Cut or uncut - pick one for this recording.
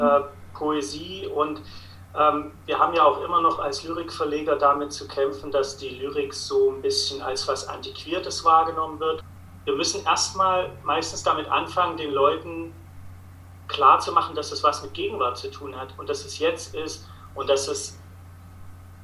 uncut